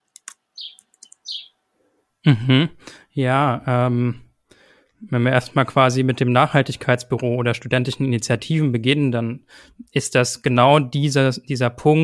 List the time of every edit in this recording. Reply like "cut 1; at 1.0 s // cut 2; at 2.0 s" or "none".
none